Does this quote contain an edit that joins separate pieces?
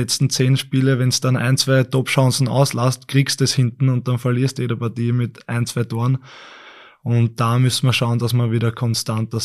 no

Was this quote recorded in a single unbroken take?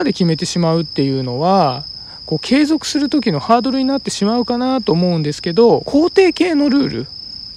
no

